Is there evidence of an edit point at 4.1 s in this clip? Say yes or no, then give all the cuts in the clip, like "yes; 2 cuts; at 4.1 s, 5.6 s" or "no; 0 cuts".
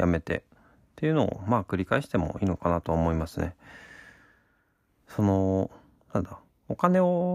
no; 0 cuts